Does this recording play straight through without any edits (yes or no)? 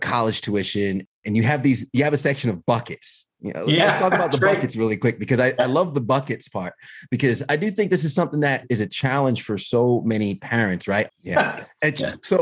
no